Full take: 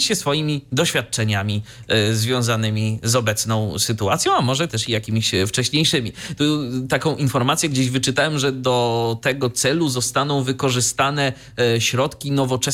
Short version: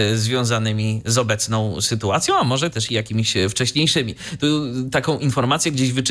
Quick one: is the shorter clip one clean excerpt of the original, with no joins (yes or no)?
yes